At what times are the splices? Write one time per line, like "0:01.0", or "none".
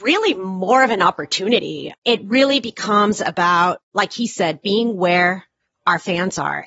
none